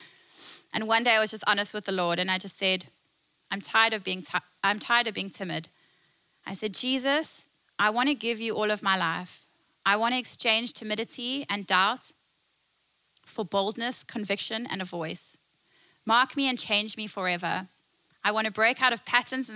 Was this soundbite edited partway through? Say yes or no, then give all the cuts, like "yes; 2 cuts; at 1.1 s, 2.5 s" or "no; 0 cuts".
no; 0 cuts